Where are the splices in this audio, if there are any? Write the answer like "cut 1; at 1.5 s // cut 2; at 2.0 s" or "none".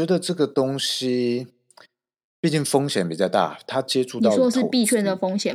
none